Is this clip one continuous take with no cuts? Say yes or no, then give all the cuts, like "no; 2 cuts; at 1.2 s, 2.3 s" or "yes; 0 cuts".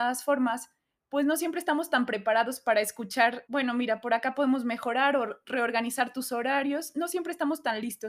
no; 1 cut; at 3.5 s